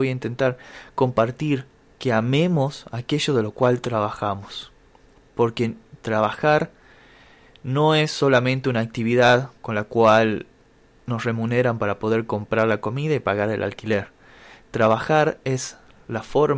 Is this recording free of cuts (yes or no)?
yes